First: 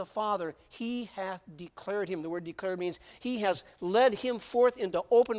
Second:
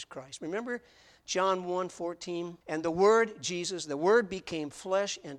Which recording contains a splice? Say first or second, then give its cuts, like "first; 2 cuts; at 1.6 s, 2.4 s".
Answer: second; 1 cut; at 2.6 s